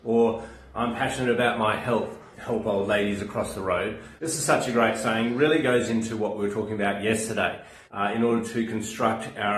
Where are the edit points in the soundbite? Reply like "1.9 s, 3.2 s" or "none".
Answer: 2.3 s, 4.2 s, 7.8 s